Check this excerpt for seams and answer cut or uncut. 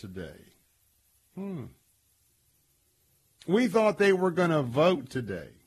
uncut